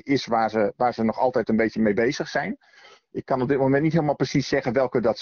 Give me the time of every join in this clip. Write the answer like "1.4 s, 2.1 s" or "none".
none

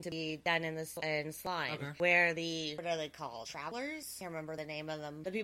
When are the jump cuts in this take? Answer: none

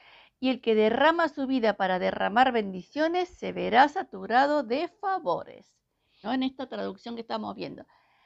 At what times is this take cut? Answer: 6.2 s

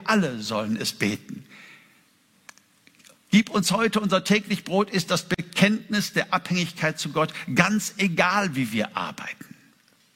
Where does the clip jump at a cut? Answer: none

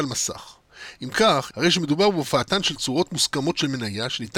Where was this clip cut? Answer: 1.5 s

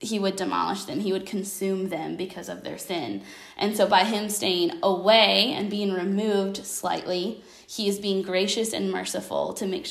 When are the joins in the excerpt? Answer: none

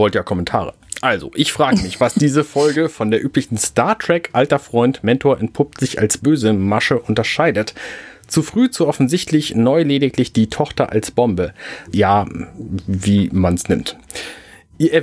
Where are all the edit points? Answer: 11.9 s

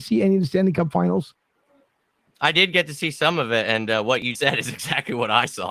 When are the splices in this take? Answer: 4.3 s

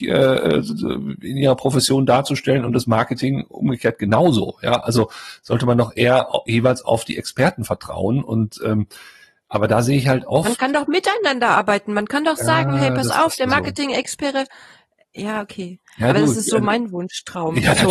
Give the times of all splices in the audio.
none

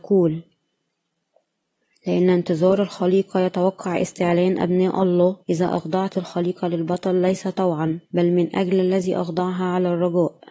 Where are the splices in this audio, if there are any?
5.4 s, 8.0 s

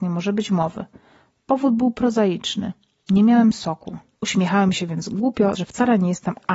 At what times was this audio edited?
4.1 s, 5.5 s

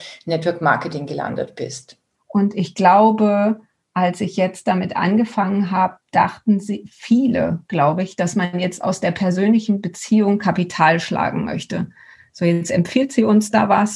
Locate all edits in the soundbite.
2.1 s

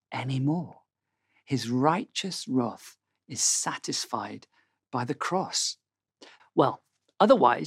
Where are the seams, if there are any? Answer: 6.4 s

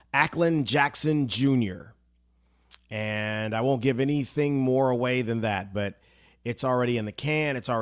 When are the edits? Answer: none

